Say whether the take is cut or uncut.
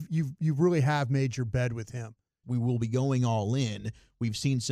cut